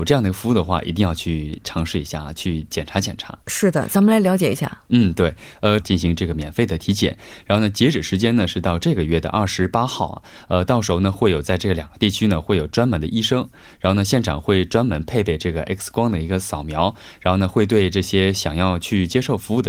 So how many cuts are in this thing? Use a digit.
1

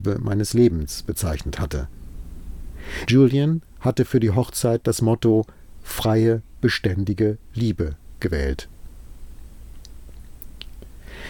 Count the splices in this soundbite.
1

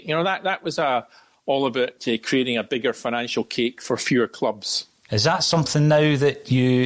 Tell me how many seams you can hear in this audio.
1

